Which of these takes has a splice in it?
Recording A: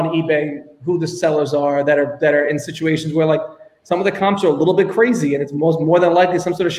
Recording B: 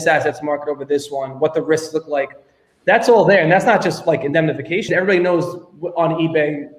B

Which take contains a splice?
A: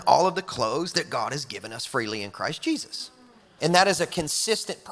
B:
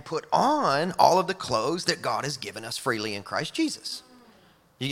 A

